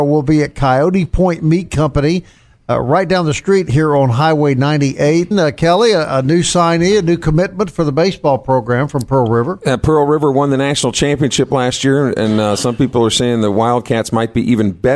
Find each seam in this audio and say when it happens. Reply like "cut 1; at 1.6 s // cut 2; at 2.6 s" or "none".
cut 1; at 5.3 s